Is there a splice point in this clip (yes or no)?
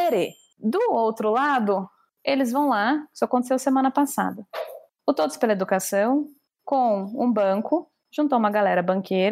no